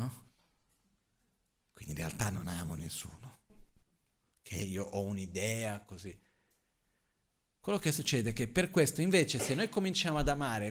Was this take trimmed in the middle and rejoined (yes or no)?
no